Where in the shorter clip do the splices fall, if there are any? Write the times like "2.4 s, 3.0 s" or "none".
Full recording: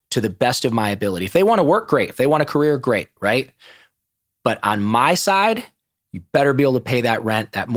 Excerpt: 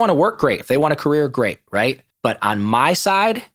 2.1 s